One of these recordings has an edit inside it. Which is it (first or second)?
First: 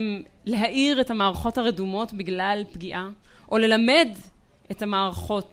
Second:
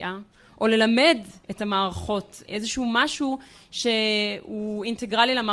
second